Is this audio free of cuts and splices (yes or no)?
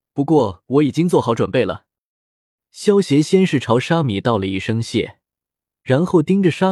yes